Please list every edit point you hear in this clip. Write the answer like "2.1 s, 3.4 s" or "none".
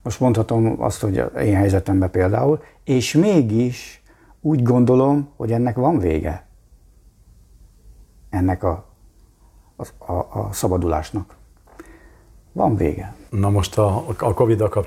13.3 s